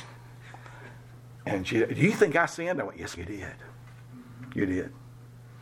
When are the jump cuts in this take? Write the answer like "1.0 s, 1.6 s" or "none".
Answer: 3.2 s